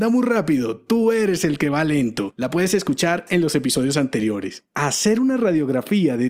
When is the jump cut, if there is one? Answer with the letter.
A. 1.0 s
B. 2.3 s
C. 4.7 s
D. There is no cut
D